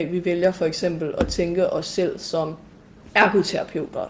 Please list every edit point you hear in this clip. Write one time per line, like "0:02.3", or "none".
none